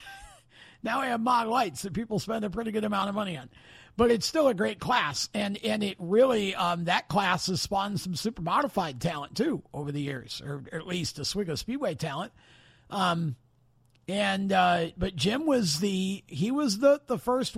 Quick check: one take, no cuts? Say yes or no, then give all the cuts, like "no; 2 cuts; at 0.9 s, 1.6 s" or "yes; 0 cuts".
yes; 0 cuts